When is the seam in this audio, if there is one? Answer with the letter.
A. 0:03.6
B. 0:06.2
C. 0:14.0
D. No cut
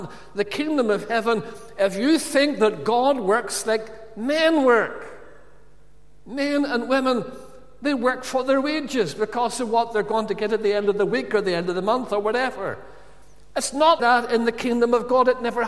C